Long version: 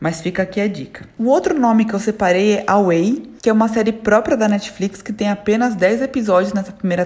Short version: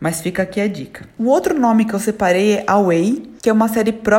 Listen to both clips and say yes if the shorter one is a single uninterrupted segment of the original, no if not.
yes